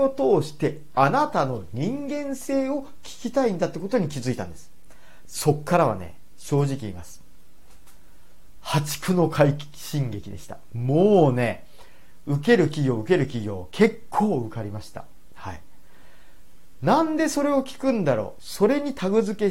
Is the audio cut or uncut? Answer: uncut